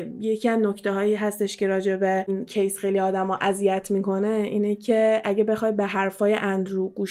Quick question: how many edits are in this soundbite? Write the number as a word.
one